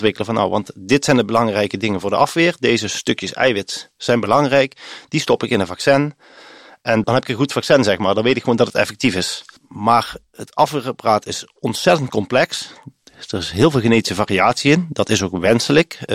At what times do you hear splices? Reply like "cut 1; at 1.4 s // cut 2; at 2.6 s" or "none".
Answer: none